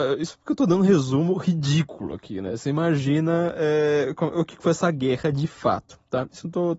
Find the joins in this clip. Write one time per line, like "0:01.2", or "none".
none